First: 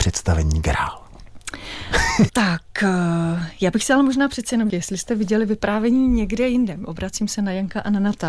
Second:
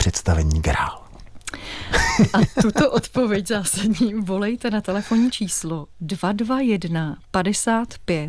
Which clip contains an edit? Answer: first; 2 cuts; at 2.3 s, 4.7 s

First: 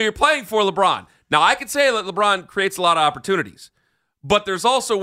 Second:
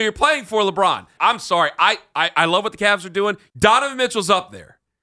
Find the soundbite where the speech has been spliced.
second; 2 cuts; at 1.2 s, 3.5 s

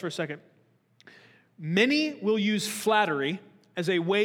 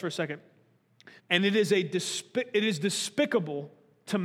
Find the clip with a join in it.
second; 1 cut; at 1.2 s

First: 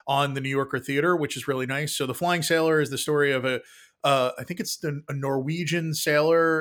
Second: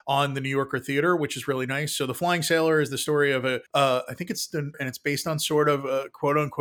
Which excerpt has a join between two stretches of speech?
second; 2 cuts; at 3.7 s, 4.7 s

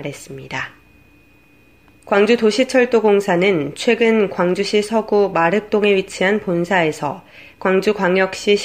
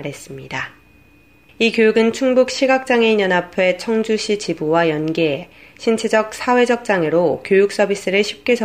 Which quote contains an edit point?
second; 1 cut; at 1.5 s

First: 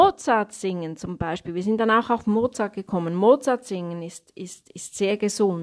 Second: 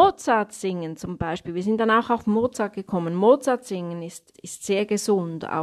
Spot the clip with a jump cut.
second; 1 cut; at 4.3 s

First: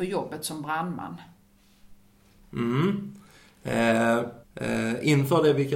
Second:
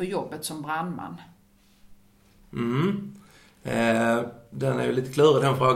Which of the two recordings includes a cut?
first; 1 cut; at 4.4 s

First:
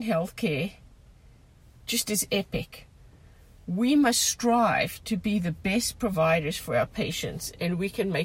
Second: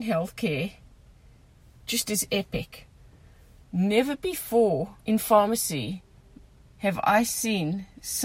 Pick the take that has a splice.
second; 2 cuts; at 3.6 s, 5.0 s

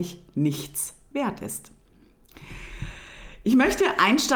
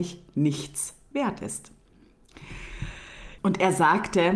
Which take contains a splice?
second; 1 cut; at 3.4 s

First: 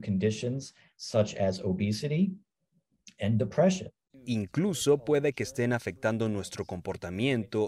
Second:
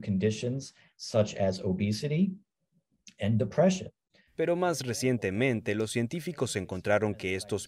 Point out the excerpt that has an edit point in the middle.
first; 1 cut; at 4.1 s

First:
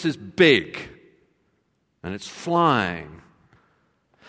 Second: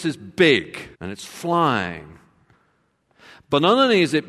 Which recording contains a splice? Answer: second; 1 cut; at 0.9 s

